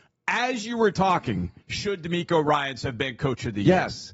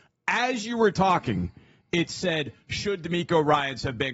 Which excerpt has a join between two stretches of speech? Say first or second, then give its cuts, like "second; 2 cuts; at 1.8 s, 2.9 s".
first; 1 cut; at 1.6 s